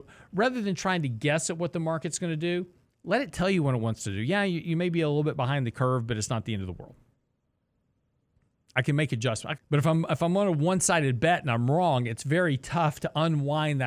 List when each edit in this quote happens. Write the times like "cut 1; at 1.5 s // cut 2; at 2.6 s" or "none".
cut 1; at 9.6 s